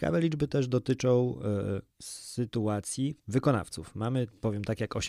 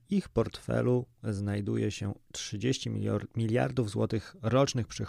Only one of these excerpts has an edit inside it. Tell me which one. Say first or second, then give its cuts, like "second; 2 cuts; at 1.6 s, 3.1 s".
first; 1 cut; at 1.9 s